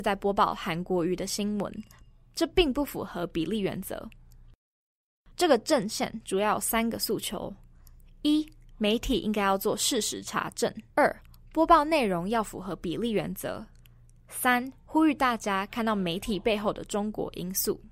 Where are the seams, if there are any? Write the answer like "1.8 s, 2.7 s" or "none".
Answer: 10.9 s